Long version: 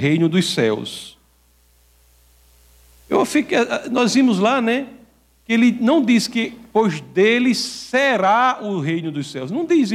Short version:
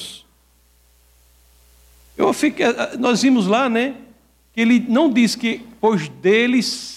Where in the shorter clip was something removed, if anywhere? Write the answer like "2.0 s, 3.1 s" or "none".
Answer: none